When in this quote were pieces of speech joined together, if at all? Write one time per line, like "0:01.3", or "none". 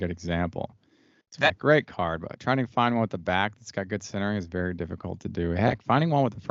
0:01.5